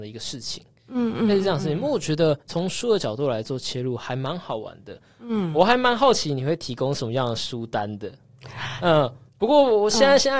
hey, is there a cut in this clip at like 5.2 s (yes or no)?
no